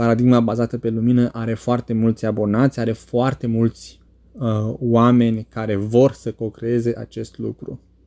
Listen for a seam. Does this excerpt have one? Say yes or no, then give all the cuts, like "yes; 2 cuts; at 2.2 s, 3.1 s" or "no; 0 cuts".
no; 0 cuts